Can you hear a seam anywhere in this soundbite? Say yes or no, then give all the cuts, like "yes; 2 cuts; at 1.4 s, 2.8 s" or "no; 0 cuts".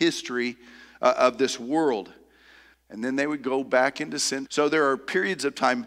yes; 2 cuts; at 2.7 s, 4.5 s